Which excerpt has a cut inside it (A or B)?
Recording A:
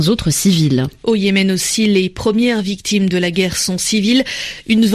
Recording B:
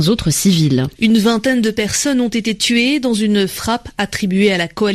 B